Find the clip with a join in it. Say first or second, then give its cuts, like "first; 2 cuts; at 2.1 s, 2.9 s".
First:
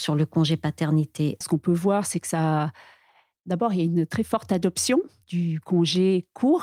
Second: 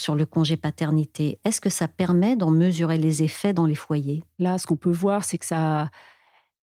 first; 1 cut; at 1.4 s